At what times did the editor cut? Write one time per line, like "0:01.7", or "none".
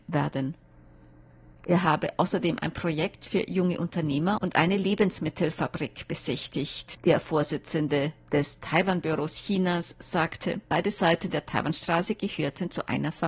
0:01.6
0:07.0

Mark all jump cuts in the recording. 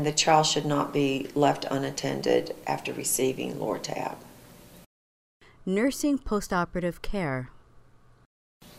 none

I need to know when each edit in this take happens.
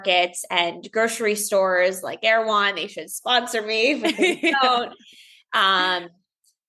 none

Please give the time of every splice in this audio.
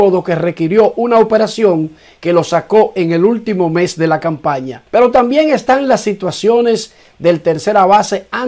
0:04.9

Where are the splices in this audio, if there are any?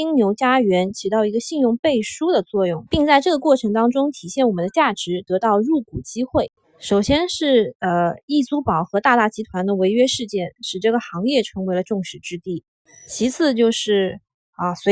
0:02.9
0:06.6

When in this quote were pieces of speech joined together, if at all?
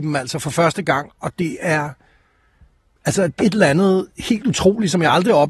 0:03.4

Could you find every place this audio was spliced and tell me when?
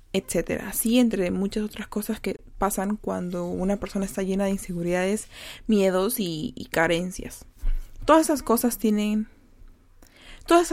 none

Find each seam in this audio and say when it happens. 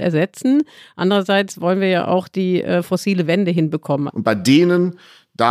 0:04.1

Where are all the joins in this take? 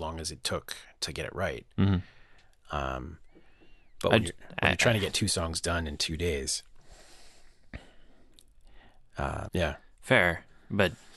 0:09.5

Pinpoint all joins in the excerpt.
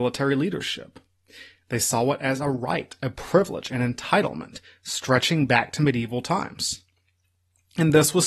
none

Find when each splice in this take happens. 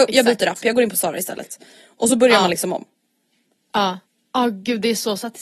none

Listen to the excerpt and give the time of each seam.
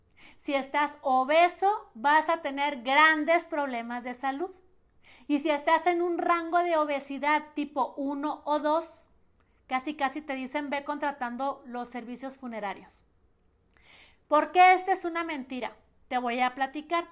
none

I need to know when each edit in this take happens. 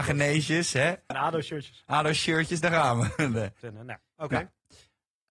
0:01.1
0:03.6

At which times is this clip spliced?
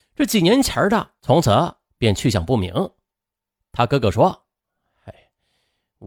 0:01.2

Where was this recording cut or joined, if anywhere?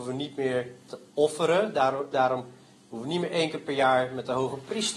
0:02.1

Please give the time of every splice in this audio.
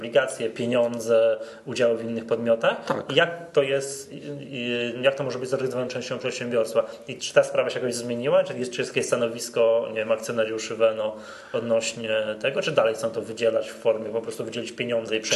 none

